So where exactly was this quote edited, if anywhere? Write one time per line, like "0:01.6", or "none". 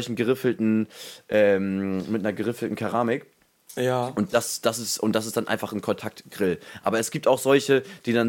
none